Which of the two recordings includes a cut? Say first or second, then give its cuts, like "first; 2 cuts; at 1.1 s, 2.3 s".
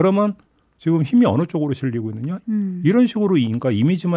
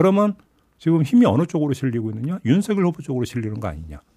first; 1 cut; at 2.4 s